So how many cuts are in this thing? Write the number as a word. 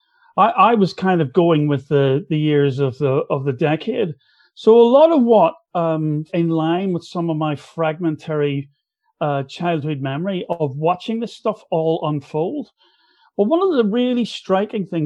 one